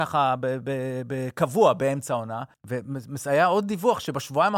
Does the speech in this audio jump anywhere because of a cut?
yes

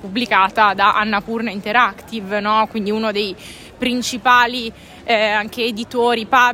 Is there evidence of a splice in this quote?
no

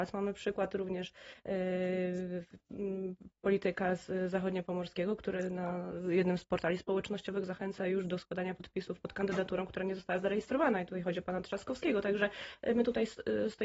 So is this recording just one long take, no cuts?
yes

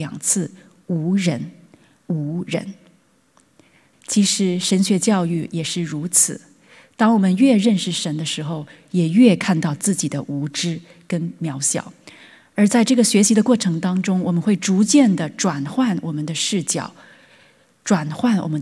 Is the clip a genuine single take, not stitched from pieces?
no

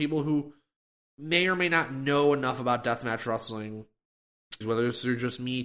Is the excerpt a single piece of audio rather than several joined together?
no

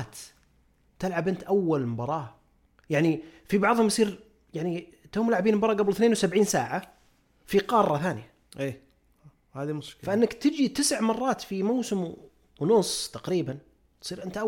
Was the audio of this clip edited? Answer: no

